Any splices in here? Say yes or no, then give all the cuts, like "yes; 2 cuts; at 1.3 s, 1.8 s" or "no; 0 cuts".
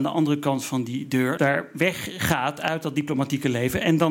yes; 1 cut; at 1.4 s